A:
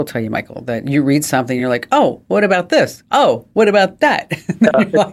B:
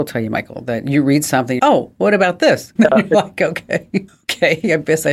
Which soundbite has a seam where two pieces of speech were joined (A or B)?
B